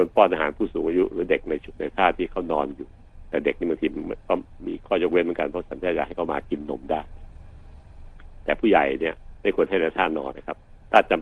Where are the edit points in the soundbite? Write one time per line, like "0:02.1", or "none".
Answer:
0:10.3